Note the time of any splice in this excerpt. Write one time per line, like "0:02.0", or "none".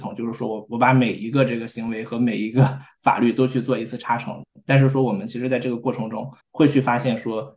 0:06.4